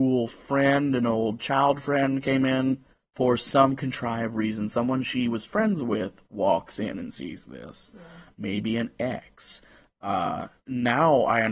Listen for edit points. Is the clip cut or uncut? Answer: cut